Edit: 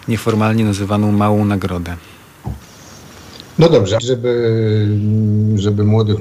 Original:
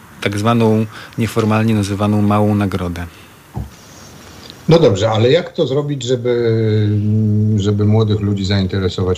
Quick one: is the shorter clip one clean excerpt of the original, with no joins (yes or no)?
no